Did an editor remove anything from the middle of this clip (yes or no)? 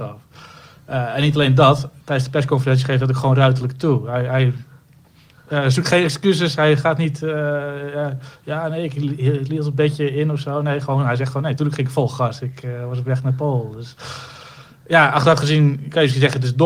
no